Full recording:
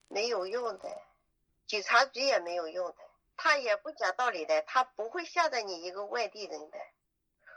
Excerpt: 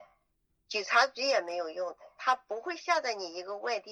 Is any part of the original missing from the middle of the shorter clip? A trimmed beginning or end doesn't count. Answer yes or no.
yes